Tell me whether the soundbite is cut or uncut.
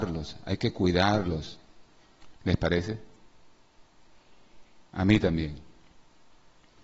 cut